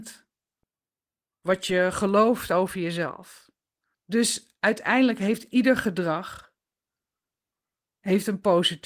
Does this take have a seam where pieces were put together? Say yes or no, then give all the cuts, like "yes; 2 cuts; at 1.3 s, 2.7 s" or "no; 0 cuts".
yes; 1 cut; at 3.9 s